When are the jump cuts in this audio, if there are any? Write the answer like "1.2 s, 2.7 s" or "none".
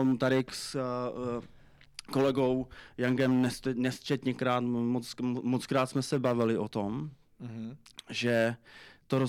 none